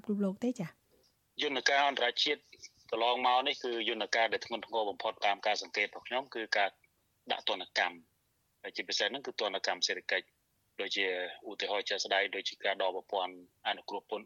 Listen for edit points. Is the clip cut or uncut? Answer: uncut